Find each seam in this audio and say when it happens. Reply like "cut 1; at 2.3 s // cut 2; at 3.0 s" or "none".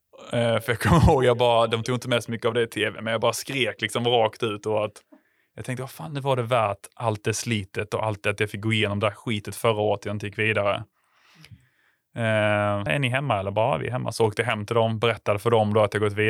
cut 1; at 12.9 s

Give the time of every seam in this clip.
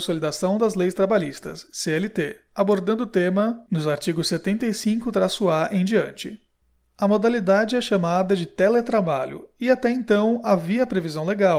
none

